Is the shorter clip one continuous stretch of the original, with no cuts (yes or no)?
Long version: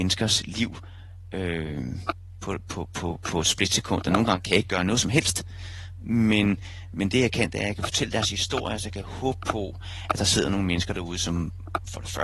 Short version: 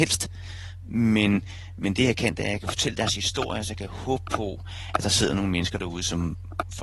yes